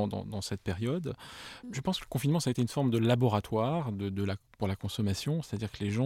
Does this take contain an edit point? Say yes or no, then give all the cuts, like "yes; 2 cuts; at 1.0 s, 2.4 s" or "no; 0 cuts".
yes; 1 cut; at 1.6 s